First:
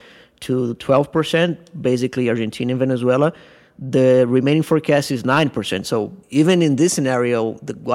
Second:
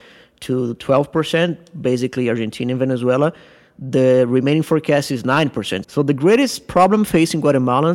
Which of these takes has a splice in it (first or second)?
second